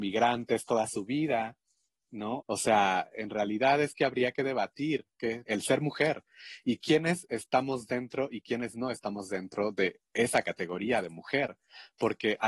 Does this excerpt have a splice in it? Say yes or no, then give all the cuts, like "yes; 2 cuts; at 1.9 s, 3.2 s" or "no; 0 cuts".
yes; 2 cuts; at 2.4 s, 5.5 s